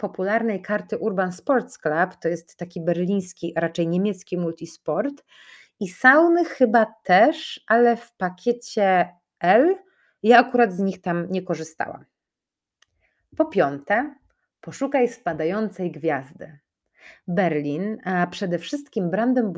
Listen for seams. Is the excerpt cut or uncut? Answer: uncut